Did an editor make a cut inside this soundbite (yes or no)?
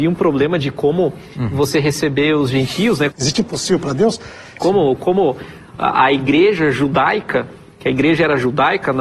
yes